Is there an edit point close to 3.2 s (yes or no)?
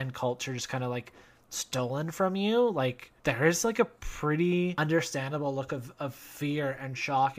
yes